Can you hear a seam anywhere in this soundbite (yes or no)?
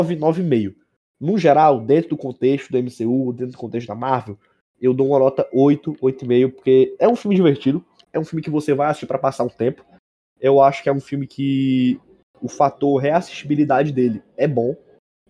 no